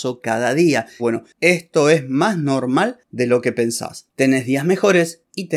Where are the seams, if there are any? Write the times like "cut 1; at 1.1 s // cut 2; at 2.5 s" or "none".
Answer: cut 1; at 1.0 s // cut 2; at 4.1 s